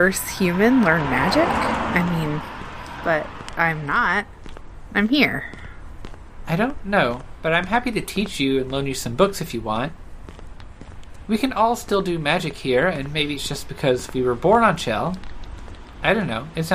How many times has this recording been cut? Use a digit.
1